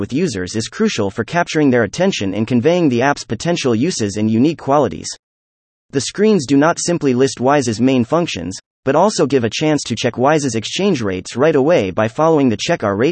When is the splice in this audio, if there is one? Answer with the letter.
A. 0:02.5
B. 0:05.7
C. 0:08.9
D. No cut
B